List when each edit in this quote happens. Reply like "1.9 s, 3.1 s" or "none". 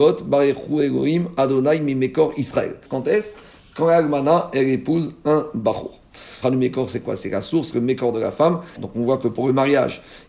2.8 s, 6.4 s, 8.8 s